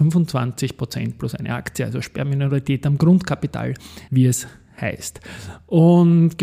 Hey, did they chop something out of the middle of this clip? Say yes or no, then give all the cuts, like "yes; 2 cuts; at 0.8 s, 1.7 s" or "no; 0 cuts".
yes; 1 cut; at 4.1 s